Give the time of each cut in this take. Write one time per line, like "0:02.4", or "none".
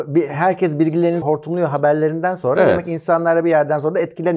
0:01.2